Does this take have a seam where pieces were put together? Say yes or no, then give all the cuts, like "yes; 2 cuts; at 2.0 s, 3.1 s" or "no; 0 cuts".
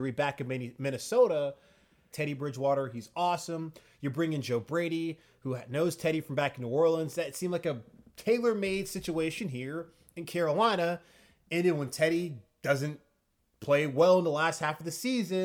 yes; 1 cut; at 2.1 s